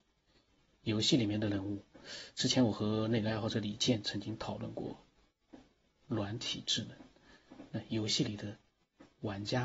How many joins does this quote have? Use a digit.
0